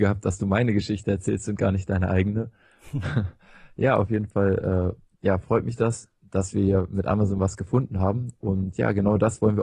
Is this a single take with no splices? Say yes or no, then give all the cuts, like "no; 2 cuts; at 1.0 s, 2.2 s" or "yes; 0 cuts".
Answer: yes; 0 cuts